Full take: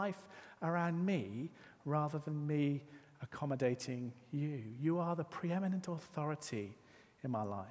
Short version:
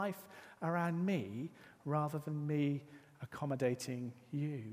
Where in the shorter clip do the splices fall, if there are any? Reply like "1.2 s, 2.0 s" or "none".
none